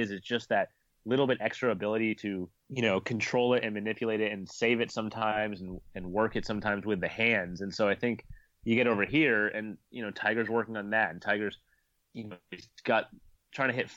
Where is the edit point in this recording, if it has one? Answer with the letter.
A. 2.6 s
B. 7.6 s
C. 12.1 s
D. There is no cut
A